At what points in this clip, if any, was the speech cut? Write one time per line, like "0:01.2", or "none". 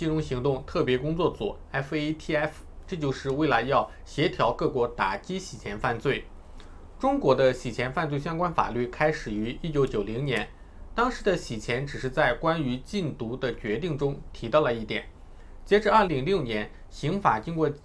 0:16.1